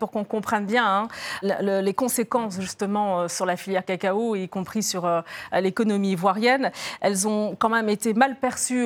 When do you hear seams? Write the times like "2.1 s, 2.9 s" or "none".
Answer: 1.4 s

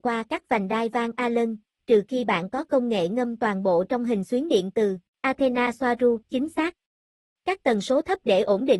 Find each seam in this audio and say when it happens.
5.1 s, 6.2 s

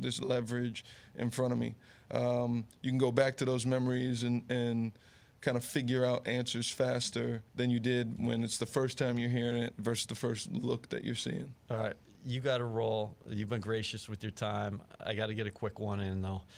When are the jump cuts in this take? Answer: 7.5 s

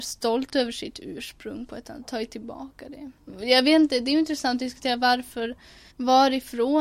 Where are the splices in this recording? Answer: 5.9 s

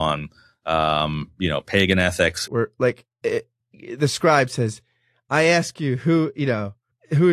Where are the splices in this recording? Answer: 2.5 s

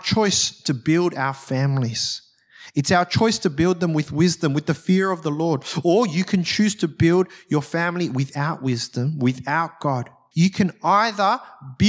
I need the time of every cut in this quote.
10.3 s

